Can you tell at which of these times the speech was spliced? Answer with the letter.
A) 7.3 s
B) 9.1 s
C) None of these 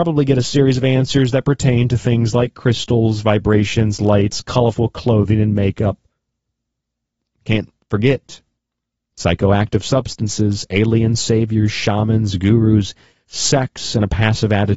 C